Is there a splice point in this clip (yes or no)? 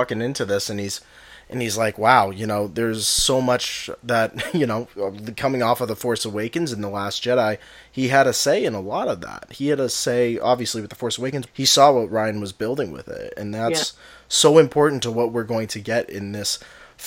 yes